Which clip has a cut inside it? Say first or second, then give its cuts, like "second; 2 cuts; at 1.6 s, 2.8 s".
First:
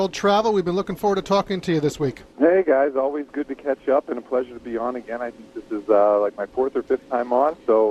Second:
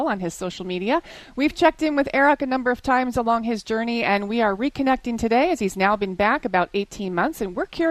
first; 1 cut; at 2.3 s